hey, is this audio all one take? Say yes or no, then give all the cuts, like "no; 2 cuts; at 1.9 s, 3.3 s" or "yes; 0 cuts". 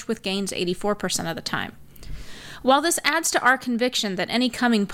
yes; 0 cuts